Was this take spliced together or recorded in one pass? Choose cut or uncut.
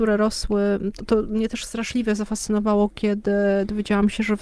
cut